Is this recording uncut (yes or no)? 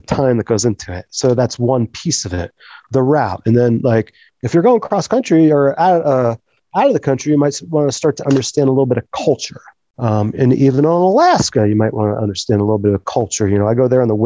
yes